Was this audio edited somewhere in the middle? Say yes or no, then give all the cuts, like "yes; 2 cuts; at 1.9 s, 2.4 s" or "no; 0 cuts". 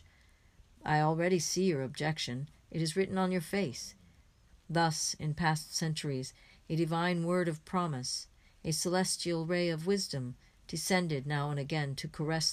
yes; 1 cut; at 4.5 s